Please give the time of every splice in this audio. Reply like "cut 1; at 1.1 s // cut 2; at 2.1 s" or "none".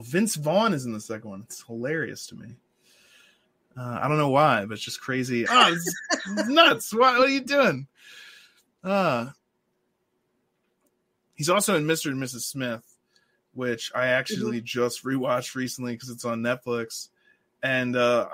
cut 1; at 5.5 s